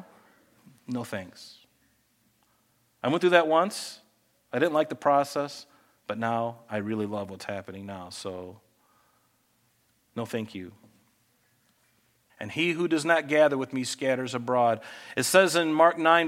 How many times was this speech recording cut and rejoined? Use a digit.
2